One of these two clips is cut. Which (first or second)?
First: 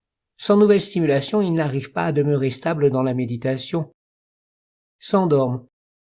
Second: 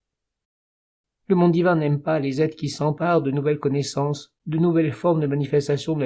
second